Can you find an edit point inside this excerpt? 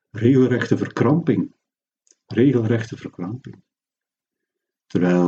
no; 0 cuts

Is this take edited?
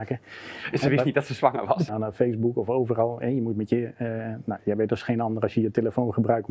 yes; 1 cut; at 1.9 s

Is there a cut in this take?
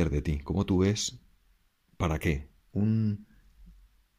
yes; 1 cut; at 2.7 s

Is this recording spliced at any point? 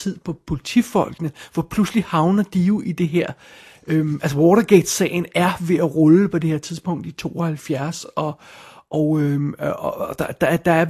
no; 0 cuts

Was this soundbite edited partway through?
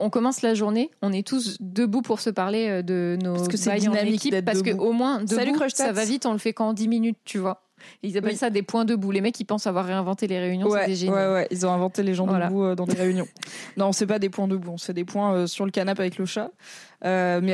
no; 0 cuts

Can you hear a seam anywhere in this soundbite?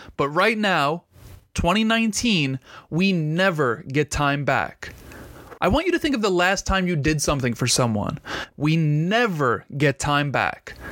yes; 2 cuts; at 5.6 s, 8.5 s

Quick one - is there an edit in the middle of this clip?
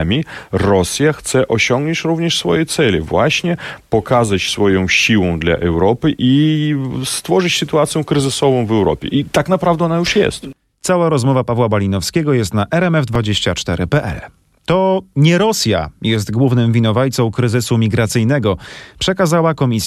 no; 0 cuts

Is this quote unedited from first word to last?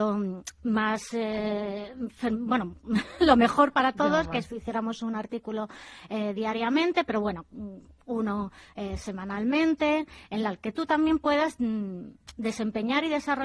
yes; 0 cuts

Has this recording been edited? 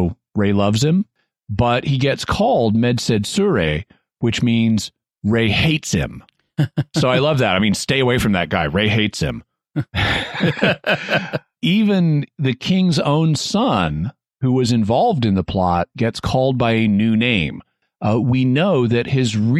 no; 0 cuts

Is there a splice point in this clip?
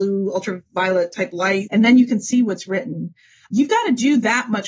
no; 0 cuts

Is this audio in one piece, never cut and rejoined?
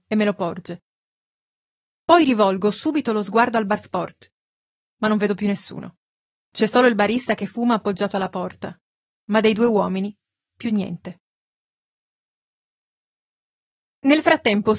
yes; 0 cuts

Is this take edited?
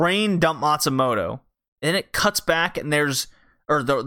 yes; 1 cut; at 1.8 s

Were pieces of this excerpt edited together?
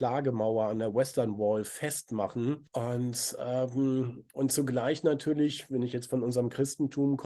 no; 0 cuts

